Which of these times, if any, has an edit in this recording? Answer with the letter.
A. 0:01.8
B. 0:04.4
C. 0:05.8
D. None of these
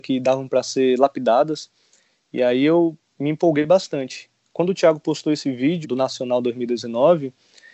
C